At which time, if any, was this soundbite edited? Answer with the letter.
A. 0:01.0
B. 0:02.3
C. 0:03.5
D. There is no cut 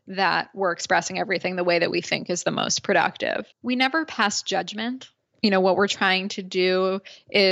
C